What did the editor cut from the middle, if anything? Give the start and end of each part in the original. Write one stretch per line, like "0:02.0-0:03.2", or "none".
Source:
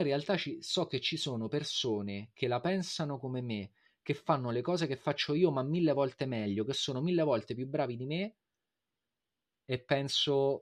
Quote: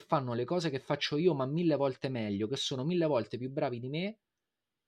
none